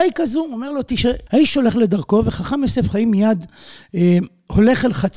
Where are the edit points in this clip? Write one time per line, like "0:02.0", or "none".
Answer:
0:01.3